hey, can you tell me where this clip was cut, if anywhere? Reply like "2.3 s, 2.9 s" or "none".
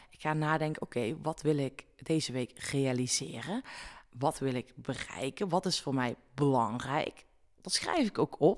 none